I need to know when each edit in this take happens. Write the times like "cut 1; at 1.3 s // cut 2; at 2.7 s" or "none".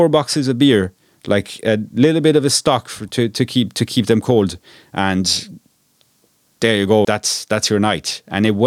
cut 1; at 7.0 s